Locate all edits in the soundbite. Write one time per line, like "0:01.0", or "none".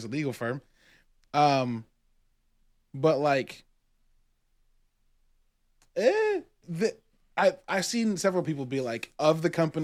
0:06.6